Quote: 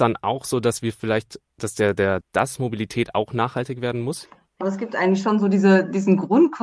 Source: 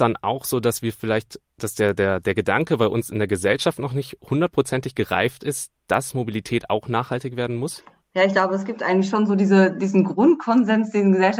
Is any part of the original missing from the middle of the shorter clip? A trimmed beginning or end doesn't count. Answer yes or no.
yes